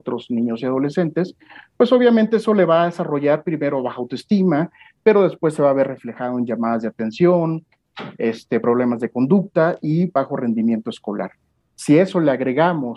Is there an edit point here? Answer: no; 0 cuts

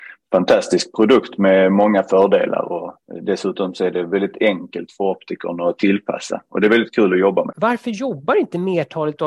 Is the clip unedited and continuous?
no; 1 cut; at 7.5 s

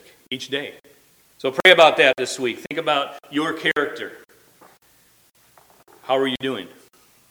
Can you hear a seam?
yes; 1 cut; at 1.3 s

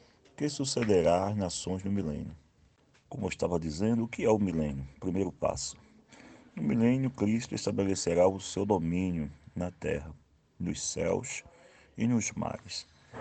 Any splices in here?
no; 0 cuts

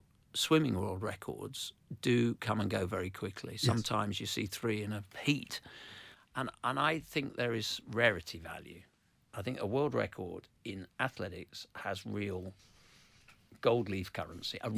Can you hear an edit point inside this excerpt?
no; 0 cuts

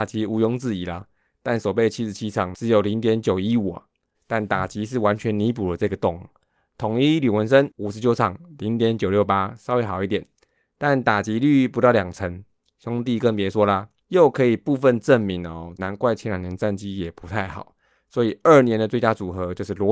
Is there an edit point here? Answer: yes; 3 cuts; at 4.1 s, 14.0 s, 15.8 s

